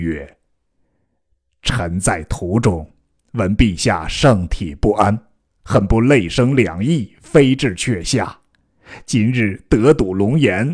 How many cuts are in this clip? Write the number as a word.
zero